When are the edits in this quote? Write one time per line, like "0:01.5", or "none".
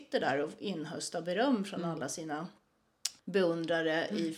0:03.2

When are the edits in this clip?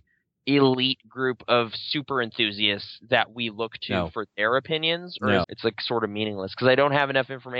0:05.4

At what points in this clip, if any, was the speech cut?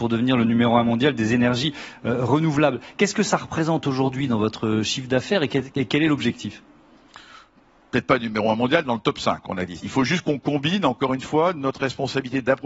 0:09.8

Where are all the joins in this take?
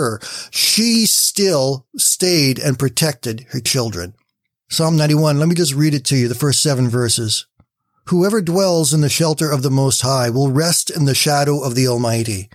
0:04.6

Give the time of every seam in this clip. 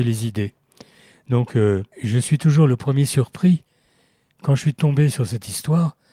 0:01.9

